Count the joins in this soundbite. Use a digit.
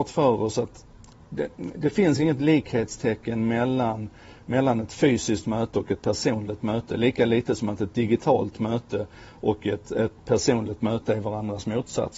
0